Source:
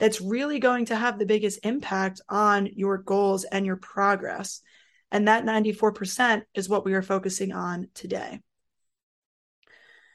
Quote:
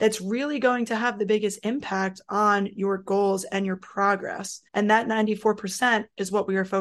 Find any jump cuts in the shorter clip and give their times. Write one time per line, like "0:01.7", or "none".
0:04.7

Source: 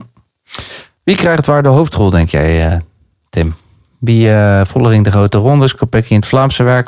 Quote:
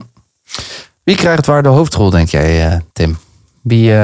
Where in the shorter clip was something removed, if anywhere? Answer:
0:02.9

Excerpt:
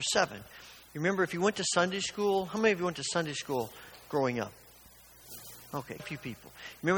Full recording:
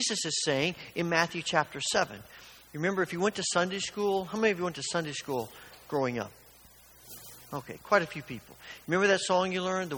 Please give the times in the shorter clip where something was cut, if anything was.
0:06.0

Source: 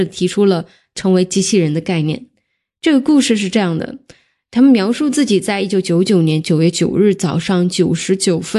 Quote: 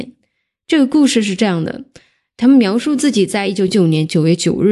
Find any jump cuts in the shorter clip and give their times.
0:03.7

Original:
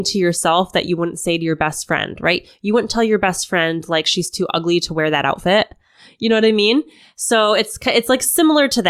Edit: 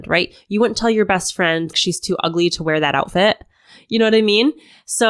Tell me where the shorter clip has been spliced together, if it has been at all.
0:01.7

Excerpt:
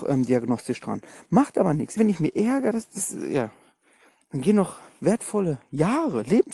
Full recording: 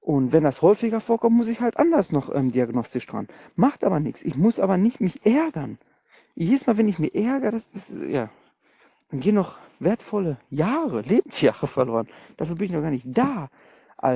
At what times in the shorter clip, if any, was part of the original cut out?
0:02.0

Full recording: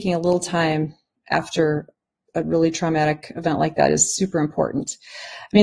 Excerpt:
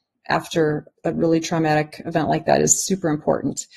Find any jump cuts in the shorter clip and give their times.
0:00.9

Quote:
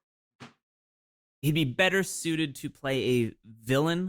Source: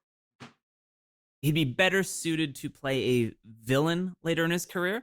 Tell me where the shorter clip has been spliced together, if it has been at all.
none

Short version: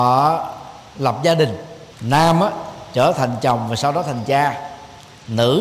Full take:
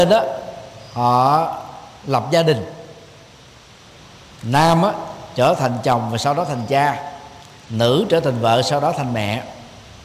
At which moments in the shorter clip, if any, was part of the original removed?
0:01.9

